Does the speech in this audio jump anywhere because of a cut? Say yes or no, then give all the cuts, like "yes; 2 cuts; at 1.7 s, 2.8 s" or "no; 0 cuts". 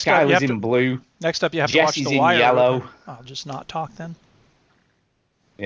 no; 0 cuts